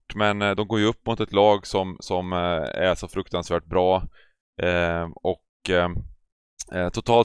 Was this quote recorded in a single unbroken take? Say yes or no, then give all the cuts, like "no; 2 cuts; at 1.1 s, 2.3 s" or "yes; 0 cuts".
yes; 0 cuts